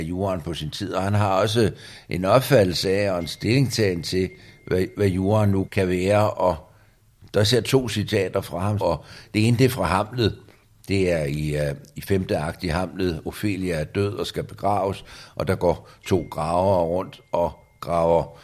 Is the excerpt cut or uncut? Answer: cut